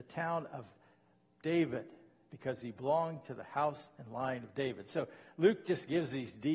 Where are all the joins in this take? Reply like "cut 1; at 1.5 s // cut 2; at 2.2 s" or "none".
none